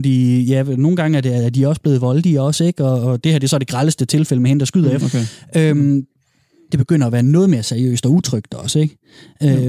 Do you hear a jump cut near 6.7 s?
yes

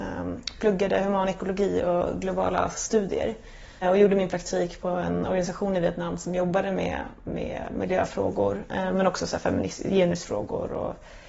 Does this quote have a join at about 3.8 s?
yes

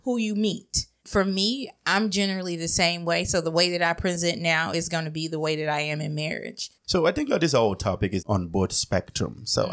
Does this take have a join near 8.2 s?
yes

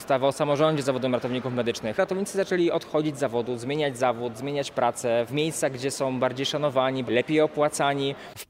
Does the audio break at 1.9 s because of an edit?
no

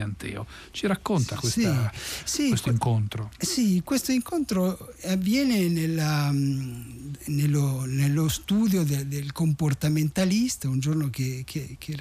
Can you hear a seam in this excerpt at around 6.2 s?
no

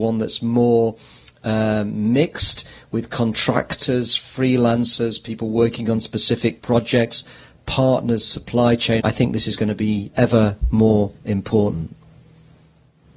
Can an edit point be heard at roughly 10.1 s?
yes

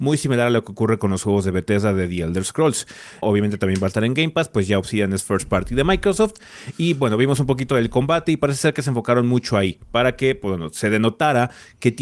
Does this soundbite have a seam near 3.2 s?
yes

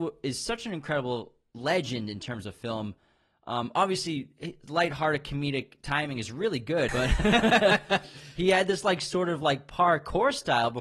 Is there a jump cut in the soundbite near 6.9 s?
yes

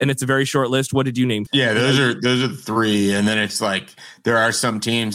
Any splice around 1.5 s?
yes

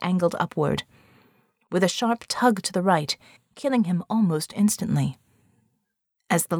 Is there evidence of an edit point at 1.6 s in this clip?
no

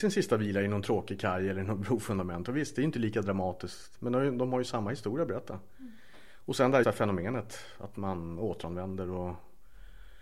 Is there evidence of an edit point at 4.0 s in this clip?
no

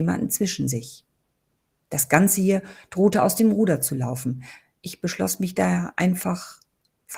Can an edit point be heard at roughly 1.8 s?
yes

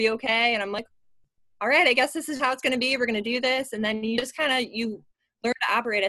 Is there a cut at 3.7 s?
no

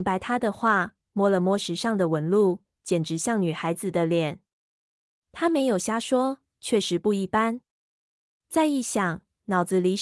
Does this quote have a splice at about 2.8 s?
yes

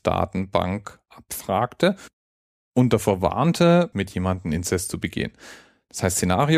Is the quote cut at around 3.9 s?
yes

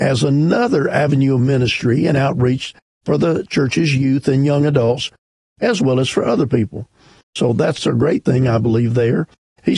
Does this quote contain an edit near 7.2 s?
yes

